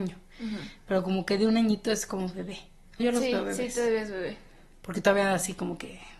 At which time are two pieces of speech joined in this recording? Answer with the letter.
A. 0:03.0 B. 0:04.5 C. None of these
A